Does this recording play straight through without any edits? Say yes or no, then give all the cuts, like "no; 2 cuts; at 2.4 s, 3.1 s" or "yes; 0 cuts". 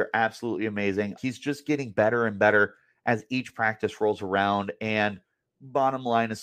no; 1 cut; at 1.2 s